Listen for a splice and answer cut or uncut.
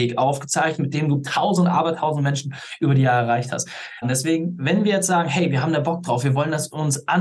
cut